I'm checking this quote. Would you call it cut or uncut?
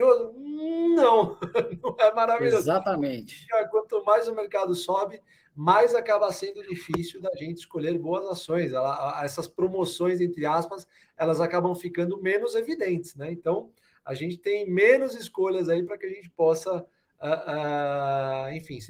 uncut